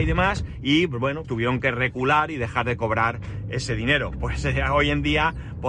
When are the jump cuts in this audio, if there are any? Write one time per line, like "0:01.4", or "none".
0:01.2